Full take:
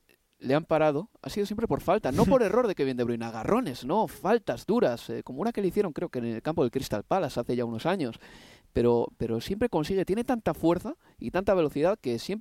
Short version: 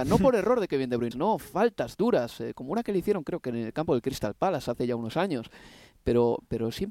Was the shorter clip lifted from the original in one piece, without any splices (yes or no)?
no